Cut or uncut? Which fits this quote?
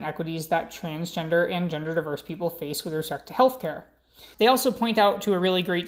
cut